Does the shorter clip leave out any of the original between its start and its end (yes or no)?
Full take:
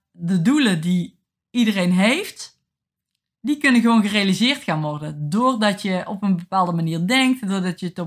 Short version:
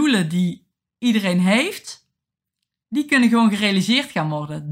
no